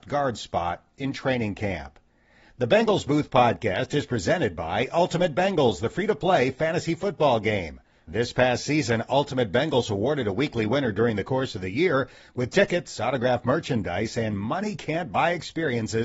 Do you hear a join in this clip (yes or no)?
no